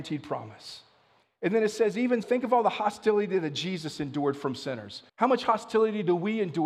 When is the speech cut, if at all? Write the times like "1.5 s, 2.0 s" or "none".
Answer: 2.2 s, 5.1 s